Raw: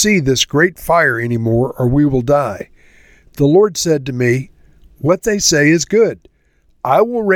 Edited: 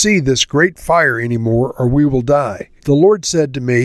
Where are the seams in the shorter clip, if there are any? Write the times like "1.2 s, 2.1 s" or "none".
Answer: 2.8 s